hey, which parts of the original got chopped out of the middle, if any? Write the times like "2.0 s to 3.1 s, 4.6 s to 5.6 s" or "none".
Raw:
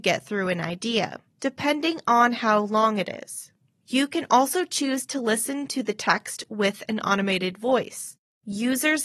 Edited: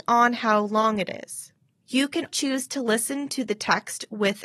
4.3 s to 4.7 s